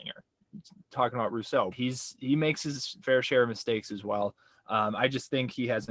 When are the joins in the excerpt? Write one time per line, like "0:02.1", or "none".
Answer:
0:01.7